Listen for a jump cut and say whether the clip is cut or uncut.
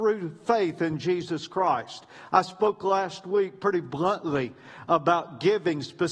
uncut